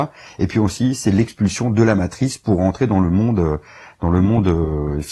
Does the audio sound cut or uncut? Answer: uncut